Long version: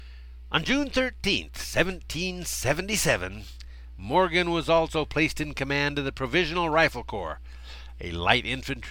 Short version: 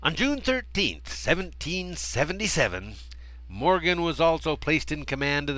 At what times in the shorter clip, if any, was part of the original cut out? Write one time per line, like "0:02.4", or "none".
none